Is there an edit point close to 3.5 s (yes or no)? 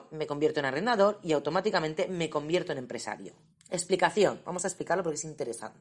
yes